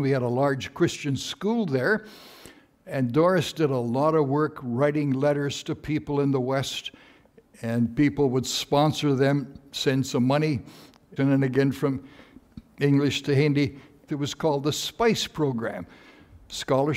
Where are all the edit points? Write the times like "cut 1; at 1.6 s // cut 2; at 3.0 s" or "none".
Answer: cut 1; at 11.2 s // cut 2; at 14.1 s